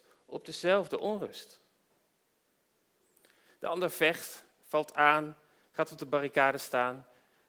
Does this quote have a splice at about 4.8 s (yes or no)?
no